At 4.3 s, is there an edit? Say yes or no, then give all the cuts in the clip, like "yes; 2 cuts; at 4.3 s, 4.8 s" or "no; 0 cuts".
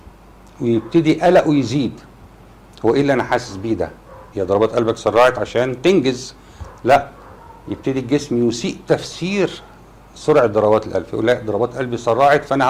yes; 1 cut; at 4.3 s